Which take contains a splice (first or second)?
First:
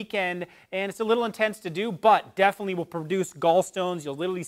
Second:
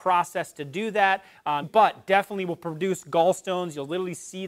second